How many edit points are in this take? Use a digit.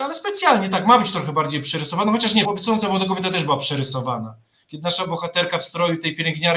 1